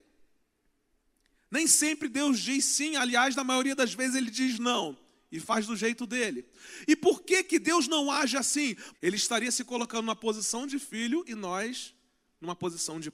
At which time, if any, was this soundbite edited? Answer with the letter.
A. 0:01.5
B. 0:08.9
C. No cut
B